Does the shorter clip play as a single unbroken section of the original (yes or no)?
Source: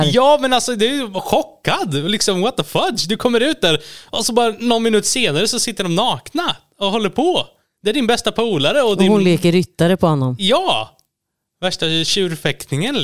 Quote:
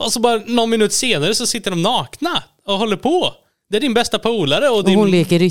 yes